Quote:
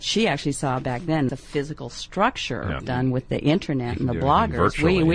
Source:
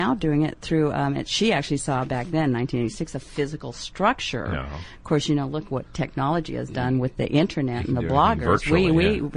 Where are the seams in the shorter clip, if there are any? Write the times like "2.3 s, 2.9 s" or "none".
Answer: 1.3 s, 2.8 s